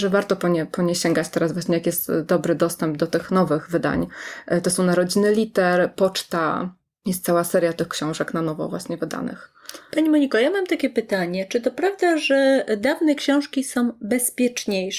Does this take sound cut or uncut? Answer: cut